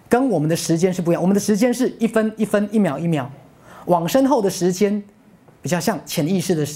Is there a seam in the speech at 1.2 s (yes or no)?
no